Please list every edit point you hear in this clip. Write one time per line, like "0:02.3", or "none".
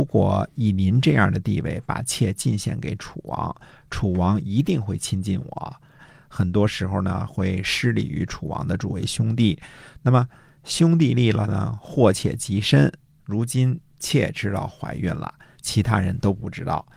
0:06.0
0:13.2

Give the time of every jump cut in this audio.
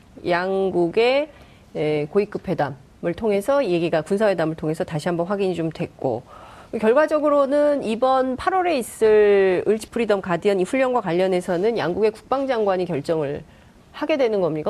0:09.9

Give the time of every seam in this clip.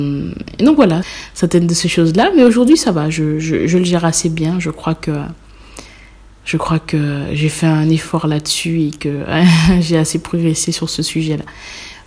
0:01.0

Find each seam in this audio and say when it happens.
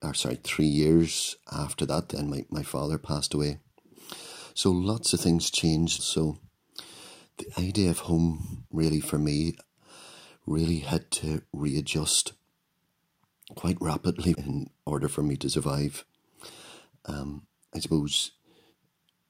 0:06.0
0:14.3

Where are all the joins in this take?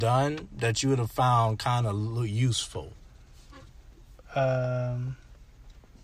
none

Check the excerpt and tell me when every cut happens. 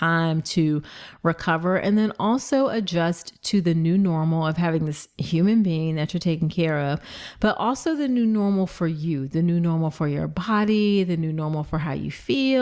none

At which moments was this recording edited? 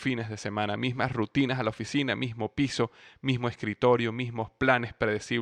none

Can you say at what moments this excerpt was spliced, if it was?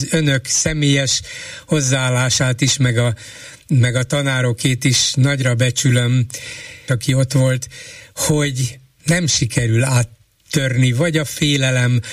0:06.9

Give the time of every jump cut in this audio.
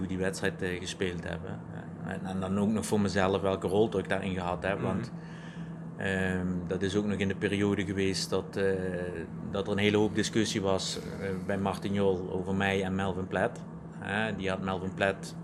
none

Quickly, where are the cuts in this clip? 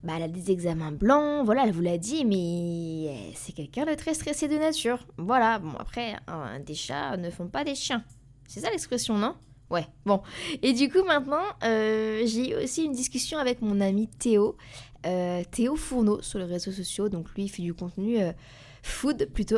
none

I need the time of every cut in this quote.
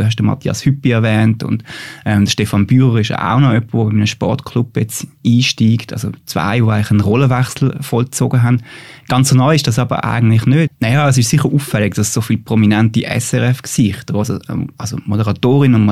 0:10.7

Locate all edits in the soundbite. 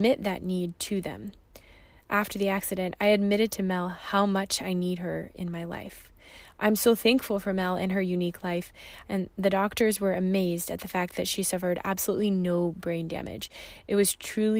0:09.0

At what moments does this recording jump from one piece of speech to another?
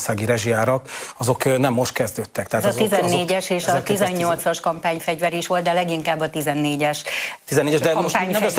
none

